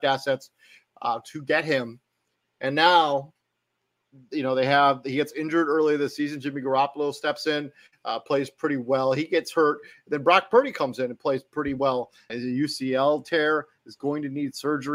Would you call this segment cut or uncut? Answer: cut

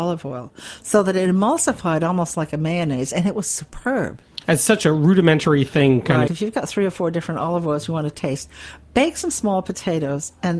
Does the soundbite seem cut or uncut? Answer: cut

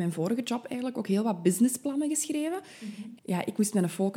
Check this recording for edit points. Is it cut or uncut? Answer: cut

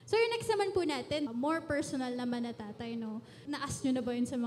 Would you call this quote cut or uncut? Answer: cut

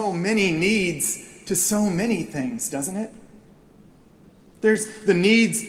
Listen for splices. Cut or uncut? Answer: uncut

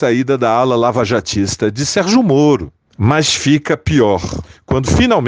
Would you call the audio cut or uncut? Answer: uncut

